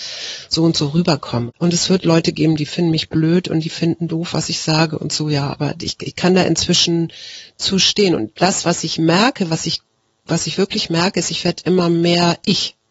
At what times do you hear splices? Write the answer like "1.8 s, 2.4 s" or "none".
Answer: 1.5 s